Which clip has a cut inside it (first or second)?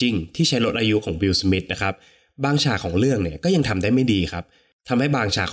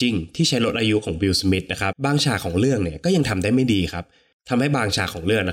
second